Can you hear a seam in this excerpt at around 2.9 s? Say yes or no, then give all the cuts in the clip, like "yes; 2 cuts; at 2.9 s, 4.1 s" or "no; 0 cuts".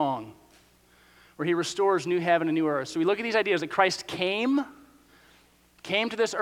no; 0 cuts